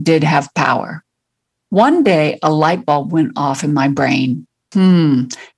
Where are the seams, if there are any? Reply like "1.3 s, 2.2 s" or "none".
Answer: none

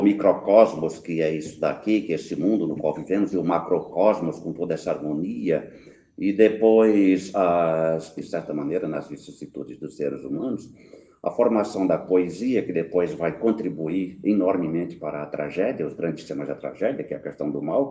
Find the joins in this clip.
8.2 s

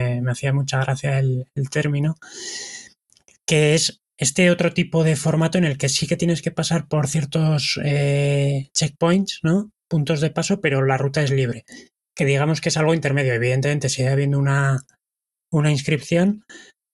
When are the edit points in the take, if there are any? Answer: none

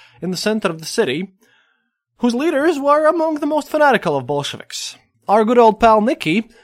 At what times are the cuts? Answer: 5.1 s

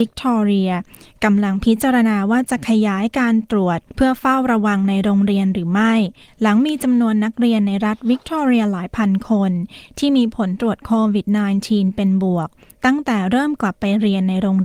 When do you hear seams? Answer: 3.9 s

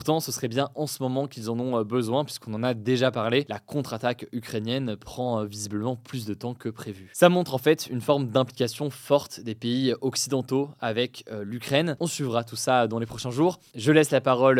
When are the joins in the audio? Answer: 7.1 s, 12.0 s

